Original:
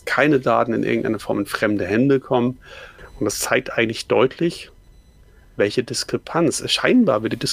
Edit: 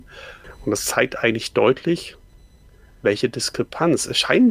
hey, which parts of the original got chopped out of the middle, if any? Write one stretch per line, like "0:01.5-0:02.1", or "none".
none